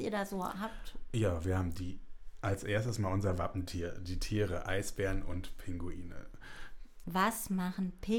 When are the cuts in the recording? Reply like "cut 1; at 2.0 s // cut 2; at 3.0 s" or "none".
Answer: cut 1; at 7.0 s